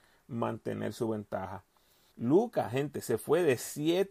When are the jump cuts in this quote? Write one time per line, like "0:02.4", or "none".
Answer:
0:02.1